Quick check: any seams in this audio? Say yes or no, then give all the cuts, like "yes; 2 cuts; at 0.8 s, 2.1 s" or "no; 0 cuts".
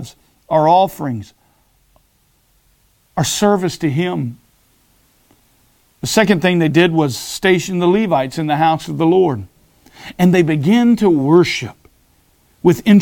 no; 0 cuts